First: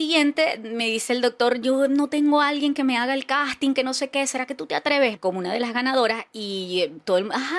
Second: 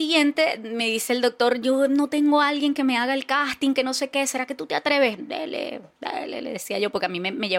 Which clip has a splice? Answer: first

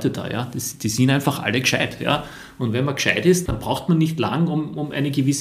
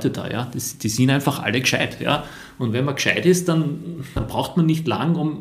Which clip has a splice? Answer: first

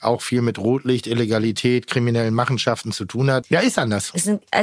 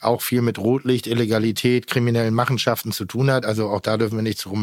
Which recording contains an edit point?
first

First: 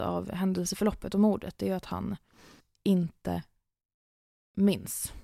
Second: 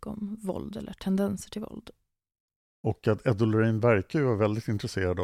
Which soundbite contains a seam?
second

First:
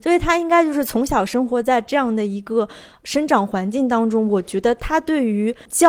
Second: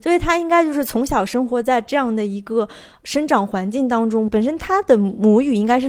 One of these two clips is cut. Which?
second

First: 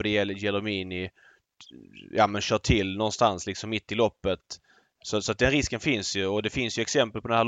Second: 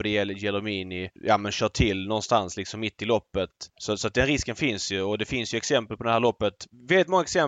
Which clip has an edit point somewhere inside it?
second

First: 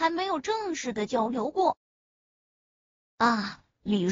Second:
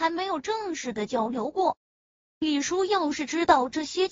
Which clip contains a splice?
second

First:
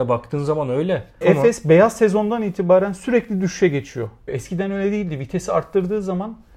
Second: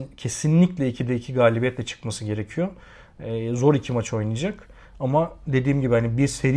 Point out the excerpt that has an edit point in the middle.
first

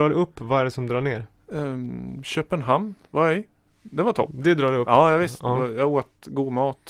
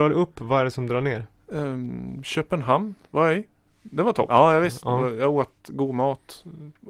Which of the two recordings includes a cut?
second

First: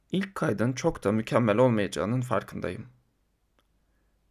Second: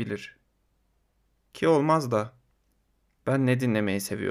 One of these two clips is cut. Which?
second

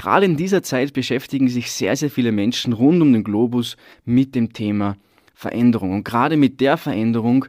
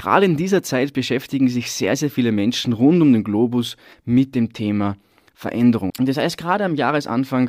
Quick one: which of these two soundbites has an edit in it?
second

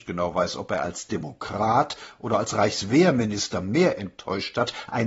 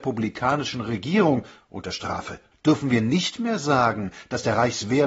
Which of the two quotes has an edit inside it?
second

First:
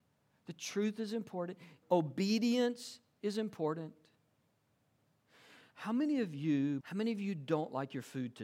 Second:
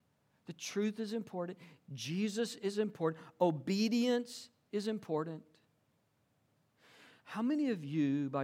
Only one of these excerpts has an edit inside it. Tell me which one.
first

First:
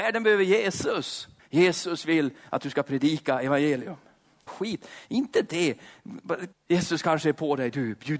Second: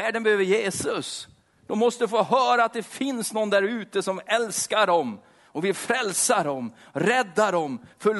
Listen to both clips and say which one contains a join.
first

